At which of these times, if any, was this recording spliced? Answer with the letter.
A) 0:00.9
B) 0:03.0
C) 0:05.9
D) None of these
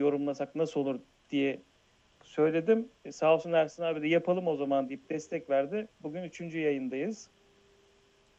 C